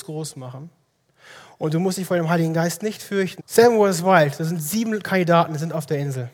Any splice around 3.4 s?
yes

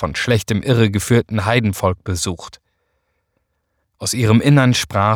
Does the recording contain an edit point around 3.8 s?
yes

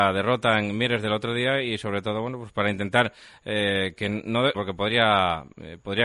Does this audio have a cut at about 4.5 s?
yes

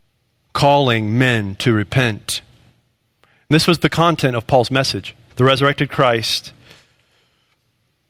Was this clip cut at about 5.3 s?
yes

